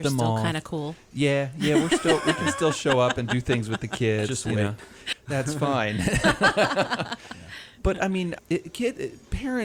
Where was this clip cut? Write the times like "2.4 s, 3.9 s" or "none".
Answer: 5.1 s, 8.4 s